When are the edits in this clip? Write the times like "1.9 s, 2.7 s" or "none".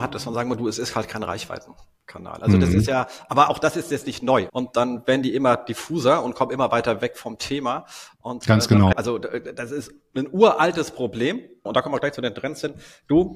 4.5 s, 8.9 s, 11.7 s